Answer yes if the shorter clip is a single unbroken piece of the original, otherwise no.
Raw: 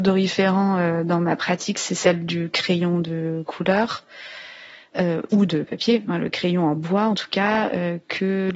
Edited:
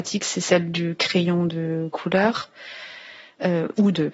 yes